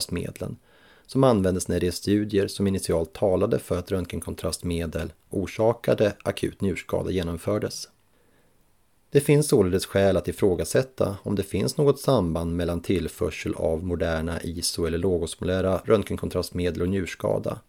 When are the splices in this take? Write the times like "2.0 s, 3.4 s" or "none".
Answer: none